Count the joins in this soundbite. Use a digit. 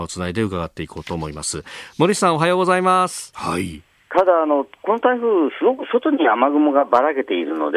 1